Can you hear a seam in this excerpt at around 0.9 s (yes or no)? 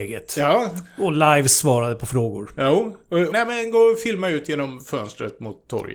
no